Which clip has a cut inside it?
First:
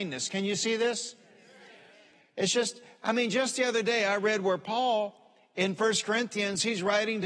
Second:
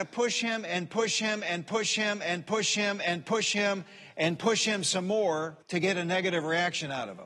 second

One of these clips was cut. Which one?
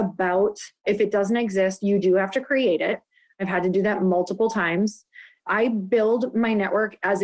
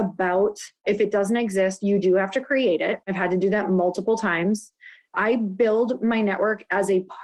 second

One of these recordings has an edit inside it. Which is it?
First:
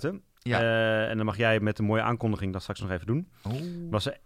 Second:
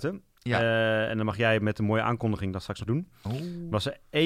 second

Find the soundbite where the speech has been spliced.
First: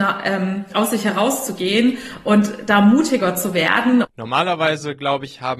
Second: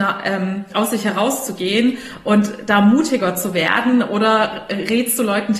first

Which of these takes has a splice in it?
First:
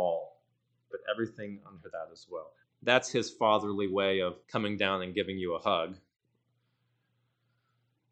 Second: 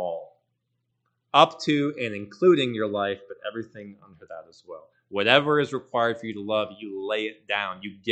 first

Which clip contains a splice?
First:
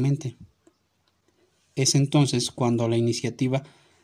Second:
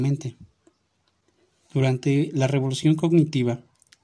second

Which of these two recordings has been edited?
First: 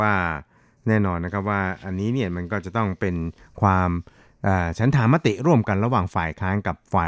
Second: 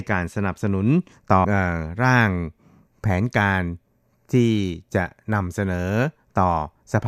second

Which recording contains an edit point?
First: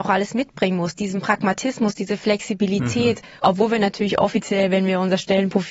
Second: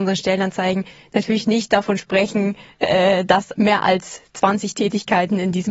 second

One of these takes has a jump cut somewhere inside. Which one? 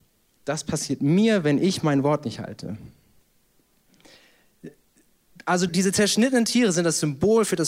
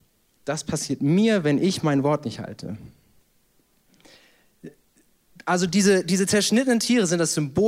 first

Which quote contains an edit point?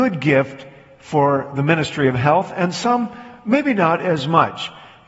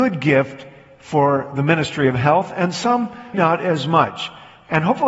second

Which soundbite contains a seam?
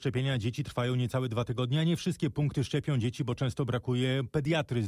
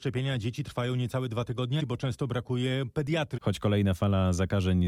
second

